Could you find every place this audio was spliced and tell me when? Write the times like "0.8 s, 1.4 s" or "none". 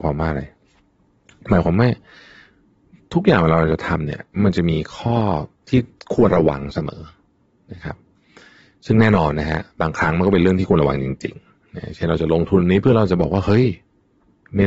6.3 s